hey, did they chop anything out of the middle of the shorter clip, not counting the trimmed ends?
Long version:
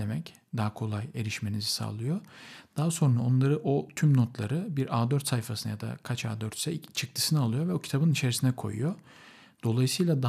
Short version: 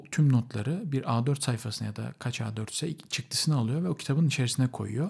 no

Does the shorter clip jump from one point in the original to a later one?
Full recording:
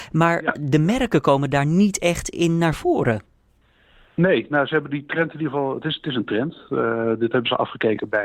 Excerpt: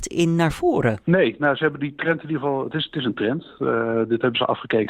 yes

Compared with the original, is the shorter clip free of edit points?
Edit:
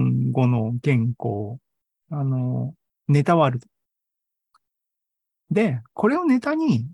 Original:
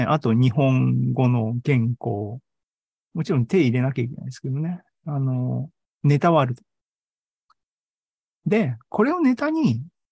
no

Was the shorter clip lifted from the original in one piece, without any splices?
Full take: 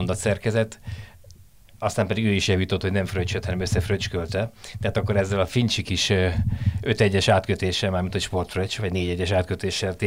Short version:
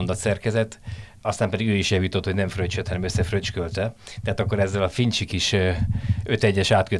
no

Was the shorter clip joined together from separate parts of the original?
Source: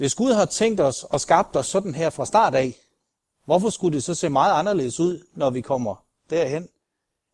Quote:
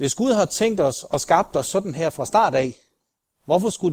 no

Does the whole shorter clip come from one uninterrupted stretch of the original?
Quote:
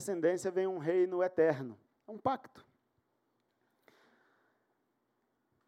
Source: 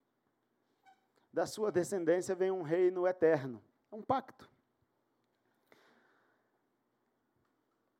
yes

